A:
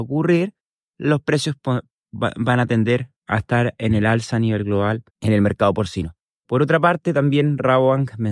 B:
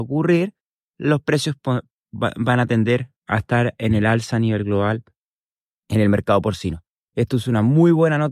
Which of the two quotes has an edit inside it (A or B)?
A